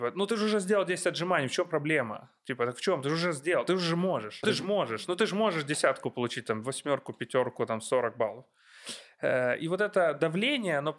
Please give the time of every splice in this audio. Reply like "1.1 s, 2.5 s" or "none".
4.4 s